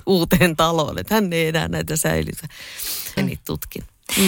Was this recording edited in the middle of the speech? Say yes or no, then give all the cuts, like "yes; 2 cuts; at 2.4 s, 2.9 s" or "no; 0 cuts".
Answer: yes; 1 cut; at 3.2 s